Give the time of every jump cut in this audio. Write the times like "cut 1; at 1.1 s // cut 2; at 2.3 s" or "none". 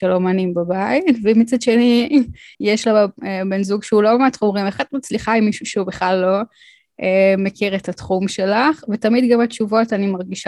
cut 1; at 2.5 s